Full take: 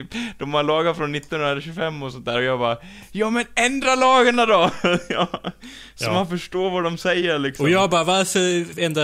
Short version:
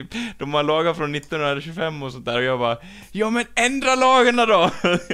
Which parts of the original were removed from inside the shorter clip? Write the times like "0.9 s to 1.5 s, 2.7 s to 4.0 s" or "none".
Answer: none